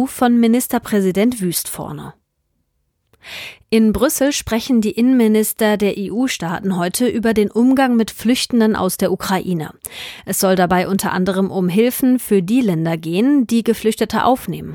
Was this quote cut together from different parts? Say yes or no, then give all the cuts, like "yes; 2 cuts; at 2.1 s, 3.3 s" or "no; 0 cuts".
no; 0 cuts